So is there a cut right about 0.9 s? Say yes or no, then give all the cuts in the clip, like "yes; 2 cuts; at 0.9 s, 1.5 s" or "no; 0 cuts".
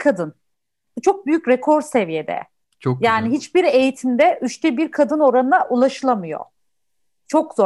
no; 0 cuts